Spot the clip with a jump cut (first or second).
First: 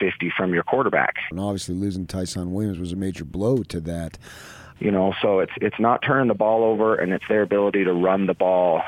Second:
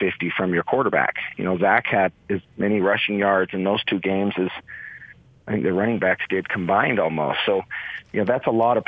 first